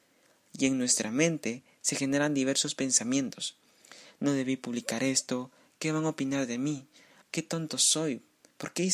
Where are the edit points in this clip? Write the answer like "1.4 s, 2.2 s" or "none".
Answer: 7.2 s